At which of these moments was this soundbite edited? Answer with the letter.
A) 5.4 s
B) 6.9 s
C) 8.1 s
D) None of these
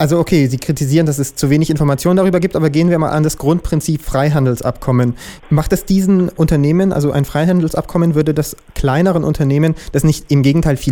A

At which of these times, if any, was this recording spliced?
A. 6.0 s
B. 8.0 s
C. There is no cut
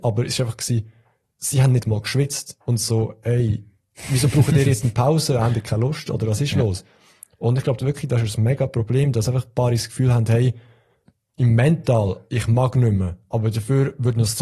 C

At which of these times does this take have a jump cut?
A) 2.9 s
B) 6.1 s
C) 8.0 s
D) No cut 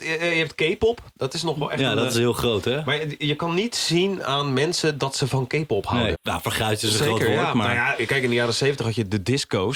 B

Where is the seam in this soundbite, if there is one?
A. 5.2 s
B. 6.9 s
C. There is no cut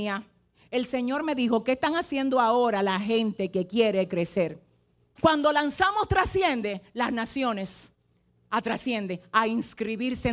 A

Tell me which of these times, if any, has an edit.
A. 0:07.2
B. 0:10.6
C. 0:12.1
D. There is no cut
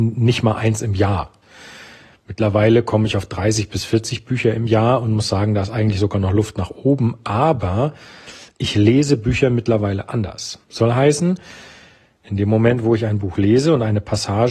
B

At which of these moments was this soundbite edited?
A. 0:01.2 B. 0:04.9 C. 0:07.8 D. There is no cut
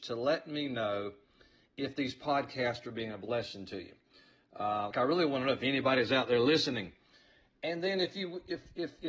B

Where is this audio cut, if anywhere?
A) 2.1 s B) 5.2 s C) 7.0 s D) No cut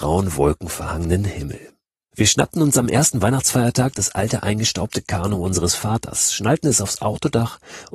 A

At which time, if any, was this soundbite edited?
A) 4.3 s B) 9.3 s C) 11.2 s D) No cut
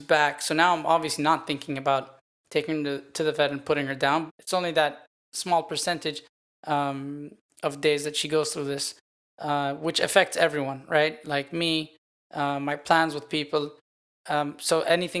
A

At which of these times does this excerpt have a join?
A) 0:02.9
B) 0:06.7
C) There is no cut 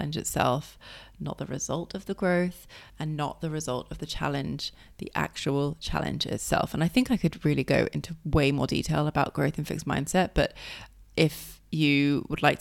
A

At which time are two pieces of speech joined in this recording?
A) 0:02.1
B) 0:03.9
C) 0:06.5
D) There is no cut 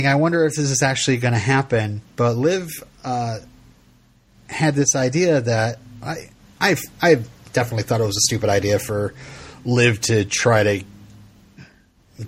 D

